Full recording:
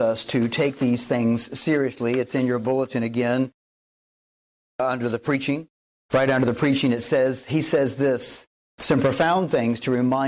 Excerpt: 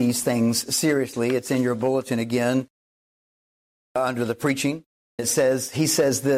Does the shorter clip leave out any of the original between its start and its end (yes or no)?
yes